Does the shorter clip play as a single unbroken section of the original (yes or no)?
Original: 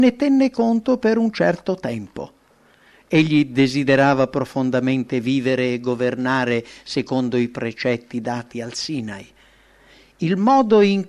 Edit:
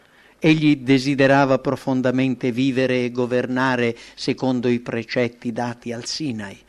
yes